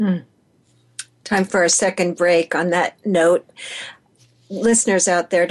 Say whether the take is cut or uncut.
uncut